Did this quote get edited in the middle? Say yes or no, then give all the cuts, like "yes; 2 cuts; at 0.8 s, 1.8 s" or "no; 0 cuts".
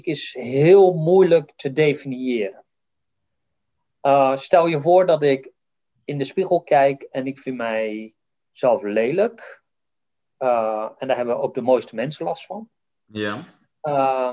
no; 0 cuts